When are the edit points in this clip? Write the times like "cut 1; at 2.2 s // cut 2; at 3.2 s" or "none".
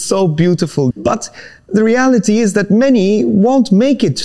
cut 1; at 0.9 s